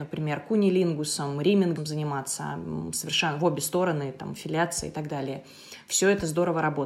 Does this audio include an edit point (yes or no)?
no